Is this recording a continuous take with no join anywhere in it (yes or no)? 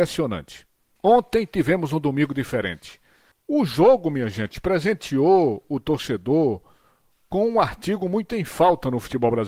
no